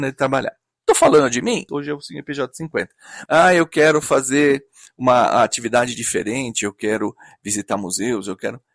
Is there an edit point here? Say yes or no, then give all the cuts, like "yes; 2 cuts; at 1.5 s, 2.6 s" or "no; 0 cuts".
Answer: yes; 2 cuts; at 1.7 s, 3.3 s